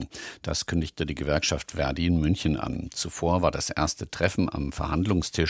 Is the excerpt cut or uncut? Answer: uncut